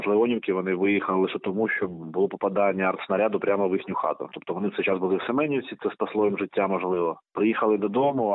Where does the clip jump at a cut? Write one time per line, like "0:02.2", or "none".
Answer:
none